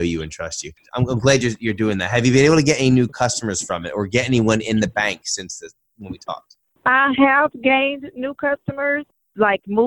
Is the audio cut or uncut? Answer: uncut